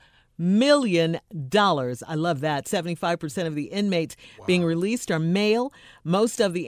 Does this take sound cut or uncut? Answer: uncut